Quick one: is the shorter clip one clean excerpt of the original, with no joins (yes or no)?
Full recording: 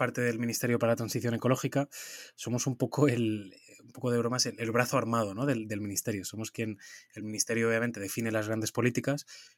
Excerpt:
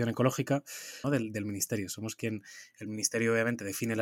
no